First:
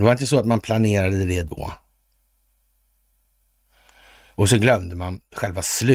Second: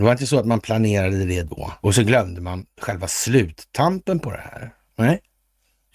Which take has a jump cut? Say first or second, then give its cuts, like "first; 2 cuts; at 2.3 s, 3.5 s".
second; 1 cut; at 1.8 s